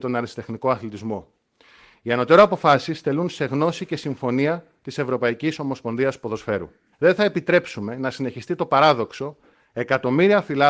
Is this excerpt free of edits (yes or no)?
no